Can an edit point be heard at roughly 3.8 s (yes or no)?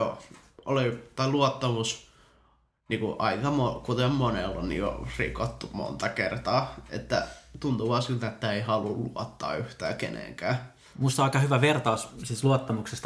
no